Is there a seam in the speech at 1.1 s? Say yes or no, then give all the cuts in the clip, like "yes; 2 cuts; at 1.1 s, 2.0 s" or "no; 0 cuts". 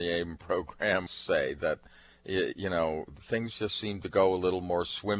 yes; 1 cut; at 1.1 s